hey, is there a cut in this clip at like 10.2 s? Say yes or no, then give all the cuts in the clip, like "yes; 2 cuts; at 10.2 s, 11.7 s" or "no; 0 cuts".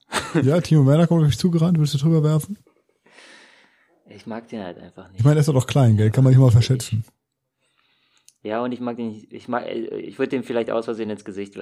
yes; 1 cut; at 10.2 s